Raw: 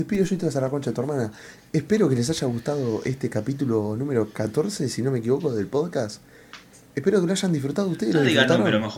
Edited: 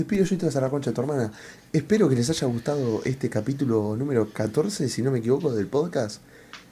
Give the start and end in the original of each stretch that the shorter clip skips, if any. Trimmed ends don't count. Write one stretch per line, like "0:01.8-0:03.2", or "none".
none